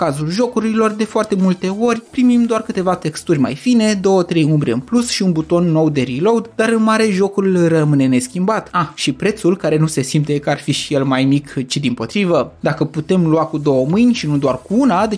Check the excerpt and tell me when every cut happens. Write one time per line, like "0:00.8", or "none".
0:12.6